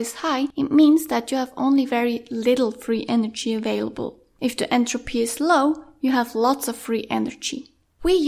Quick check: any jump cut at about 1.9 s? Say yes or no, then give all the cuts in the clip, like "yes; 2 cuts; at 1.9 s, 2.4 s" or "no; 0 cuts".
no; 0 cuts